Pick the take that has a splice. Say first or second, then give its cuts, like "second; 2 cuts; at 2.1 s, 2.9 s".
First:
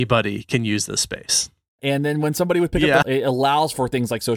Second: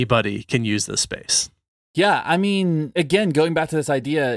first; 2 cuts; at 1.8 s, 3.0 s